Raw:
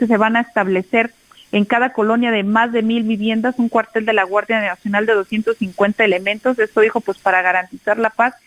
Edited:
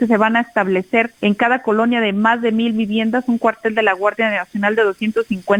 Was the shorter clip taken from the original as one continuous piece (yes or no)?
no